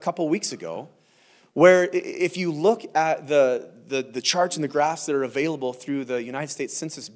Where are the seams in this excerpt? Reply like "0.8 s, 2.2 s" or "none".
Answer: none